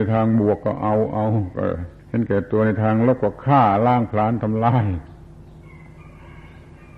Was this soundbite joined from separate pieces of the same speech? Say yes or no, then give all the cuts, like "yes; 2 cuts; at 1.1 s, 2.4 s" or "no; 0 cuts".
yes; 1 cut; at 2.0 s